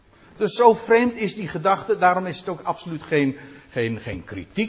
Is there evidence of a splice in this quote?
no; 0 cuts

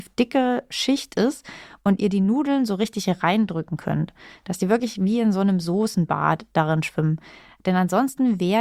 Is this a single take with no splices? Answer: yes; 0 cuts

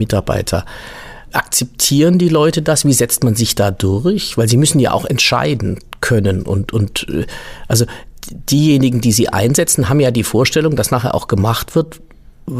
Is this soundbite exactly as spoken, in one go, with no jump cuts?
yes; 0 cuts

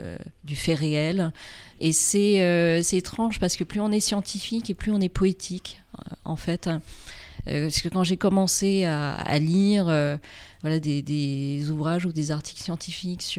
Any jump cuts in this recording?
yes; 1 cut; at 1.8 s

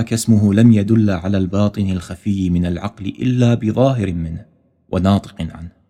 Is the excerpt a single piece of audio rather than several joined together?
yes; 0 cuts

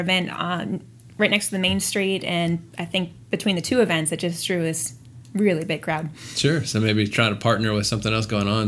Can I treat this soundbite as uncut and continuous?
yes; 0 cuts

